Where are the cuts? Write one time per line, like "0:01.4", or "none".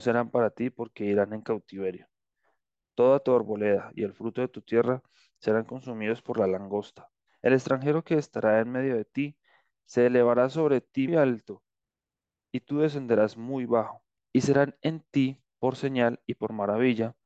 0:11.1
0:14.2